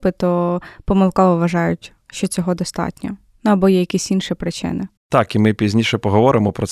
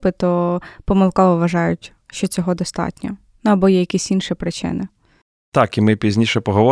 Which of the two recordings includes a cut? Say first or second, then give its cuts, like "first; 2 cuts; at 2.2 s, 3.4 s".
first; 1 cut; at 5.0 s